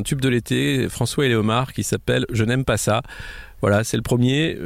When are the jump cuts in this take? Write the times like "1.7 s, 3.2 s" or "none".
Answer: none